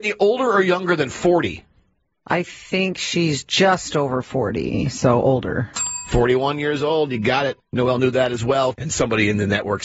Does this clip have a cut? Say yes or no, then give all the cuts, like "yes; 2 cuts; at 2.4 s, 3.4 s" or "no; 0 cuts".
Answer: yes; 1 cut; at 8.7 s